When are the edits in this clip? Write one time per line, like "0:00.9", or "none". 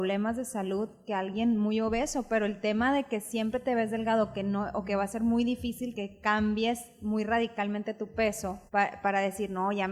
0:05.9
0:08.7